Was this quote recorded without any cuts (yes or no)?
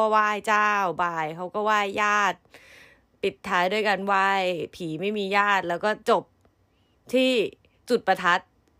yes